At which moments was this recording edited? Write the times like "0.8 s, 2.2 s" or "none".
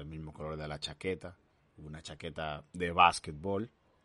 2.7 s

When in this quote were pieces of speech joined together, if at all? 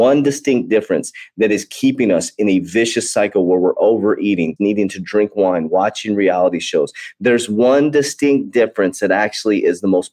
4.6 s

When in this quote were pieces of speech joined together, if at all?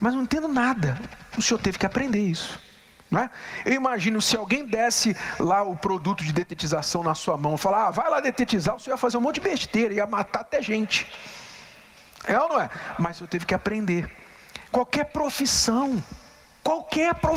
none

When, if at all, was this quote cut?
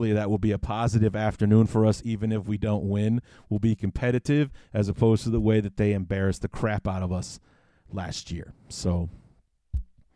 none

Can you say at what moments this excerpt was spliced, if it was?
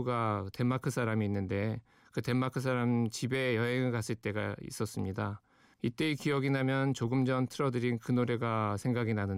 5.7 s

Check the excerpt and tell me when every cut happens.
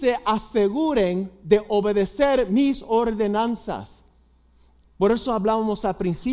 4.8 s

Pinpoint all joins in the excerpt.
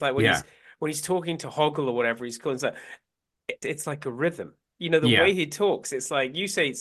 3.6 s

